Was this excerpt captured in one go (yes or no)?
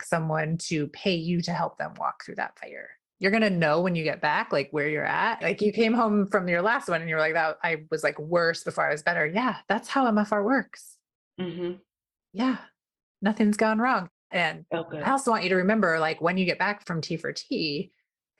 no